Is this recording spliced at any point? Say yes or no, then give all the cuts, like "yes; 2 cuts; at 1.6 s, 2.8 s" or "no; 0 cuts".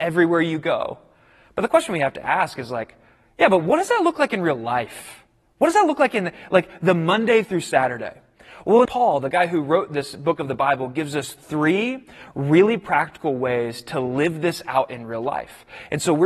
yes; 1 cut; at 8.8 s